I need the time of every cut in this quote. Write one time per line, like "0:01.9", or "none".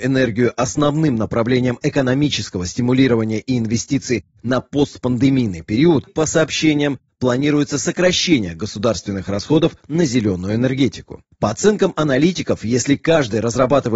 0:06.1